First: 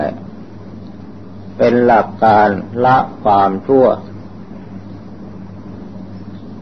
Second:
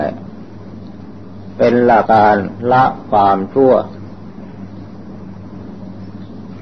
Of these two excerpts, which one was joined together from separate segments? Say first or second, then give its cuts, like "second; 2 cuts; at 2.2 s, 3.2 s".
second; 1 cut; at 2.1 s